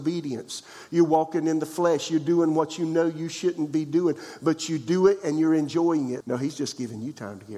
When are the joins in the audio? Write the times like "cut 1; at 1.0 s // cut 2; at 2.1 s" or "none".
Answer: cut 1; at 6.2 s